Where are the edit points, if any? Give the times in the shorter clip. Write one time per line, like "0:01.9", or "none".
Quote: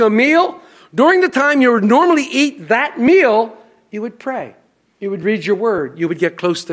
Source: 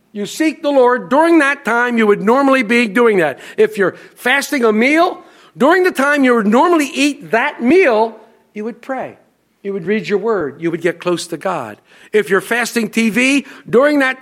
none